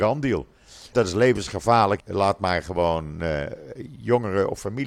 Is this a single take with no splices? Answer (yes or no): no